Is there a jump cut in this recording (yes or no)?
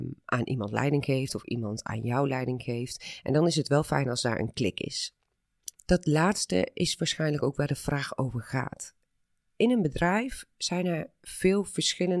yes